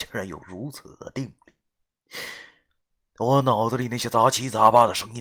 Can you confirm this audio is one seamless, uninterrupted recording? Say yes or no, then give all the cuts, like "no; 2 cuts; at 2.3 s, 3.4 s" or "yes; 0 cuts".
no; 1 cut; at 3.1 s